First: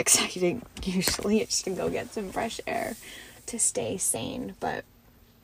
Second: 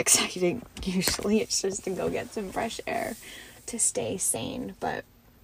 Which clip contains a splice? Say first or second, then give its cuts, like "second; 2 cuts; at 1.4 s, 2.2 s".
first; 1 cut; at 1.6 s